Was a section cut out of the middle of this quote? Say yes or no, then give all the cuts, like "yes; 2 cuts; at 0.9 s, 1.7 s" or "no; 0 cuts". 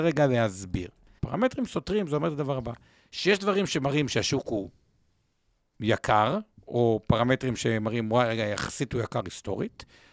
yes; 1 cut; at 1.2 s